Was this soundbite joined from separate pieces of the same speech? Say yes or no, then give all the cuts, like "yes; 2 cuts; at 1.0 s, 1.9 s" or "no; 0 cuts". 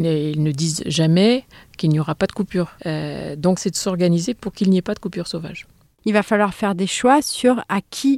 yes; 1 cut; at 3.6 s